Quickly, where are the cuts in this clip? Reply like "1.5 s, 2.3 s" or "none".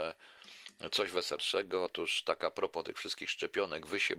none